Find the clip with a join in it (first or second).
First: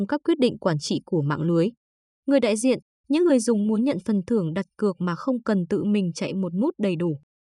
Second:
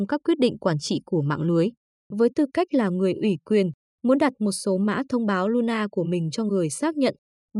second